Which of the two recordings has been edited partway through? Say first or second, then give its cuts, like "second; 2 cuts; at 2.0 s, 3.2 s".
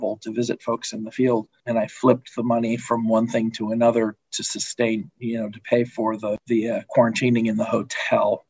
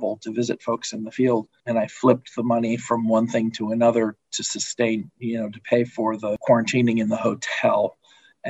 second; 1 cut; at 6.4 s